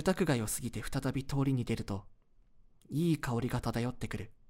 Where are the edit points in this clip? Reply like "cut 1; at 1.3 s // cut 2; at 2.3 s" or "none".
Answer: none